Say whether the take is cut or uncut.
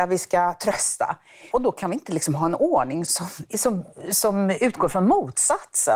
cut